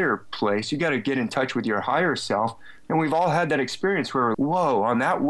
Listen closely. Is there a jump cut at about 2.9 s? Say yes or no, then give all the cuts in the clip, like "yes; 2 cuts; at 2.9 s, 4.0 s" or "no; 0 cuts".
no; 1 cut; at 4.3 s